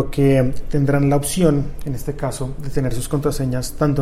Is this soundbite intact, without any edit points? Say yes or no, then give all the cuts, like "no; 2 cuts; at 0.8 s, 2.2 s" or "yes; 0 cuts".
yes; 0 cuts